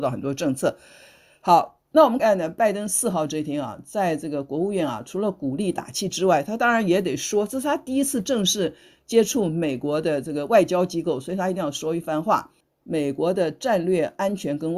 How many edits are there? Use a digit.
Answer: 2